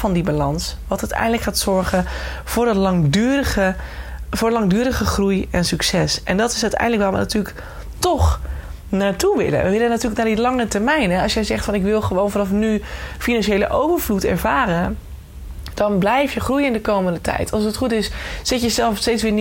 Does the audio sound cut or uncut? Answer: uncut